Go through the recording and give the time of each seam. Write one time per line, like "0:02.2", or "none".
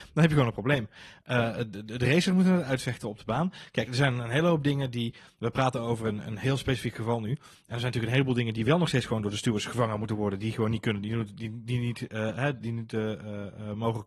0:03.9